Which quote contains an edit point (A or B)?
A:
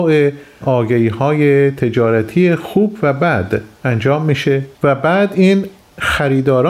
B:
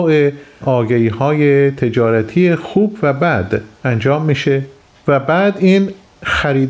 A